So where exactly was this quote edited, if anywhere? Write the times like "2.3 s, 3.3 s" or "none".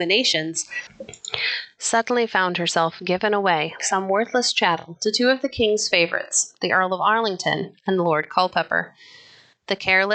3.8 s

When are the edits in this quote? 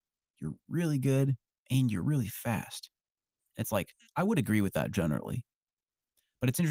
none

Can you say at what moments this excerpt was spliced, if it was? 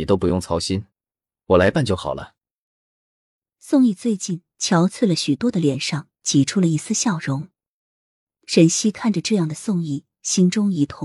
none

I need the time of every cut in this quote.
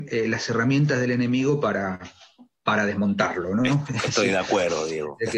none

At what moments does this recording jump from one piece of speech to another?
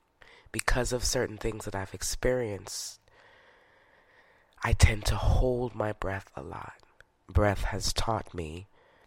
7.2 s

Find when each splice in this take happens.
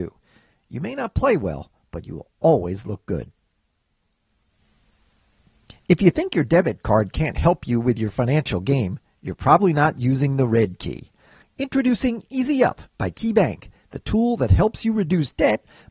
none

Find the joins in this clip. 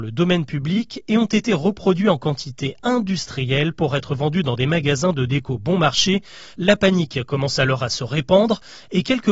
6.5 s

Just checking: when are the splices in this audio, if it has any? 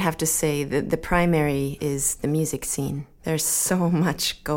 none

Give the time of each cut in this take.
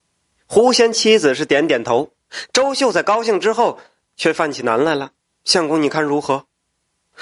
5.3 s

